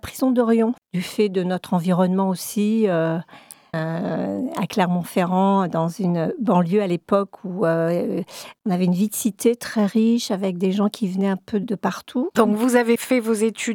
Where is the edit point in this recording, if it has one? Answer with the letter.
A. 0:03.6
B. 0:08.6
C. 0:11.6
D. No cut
C